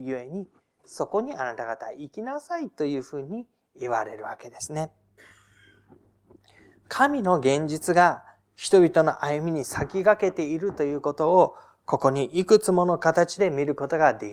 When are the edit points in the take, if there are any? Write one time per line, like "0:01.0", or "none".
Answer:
none